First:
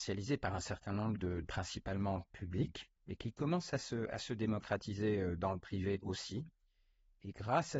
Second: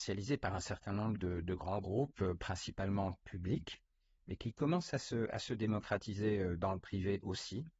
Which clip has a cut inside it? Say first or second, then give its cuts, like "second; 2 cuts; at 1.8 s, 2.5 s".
first; 2 cuts; at 1.4 s, 3.0 s